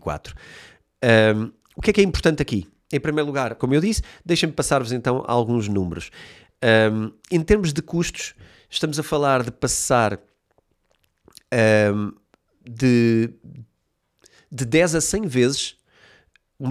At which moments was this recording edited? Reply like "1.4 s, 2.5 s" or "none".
3.6 s